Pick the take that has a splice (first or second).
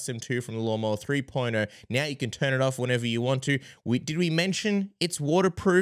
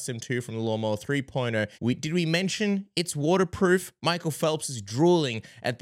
second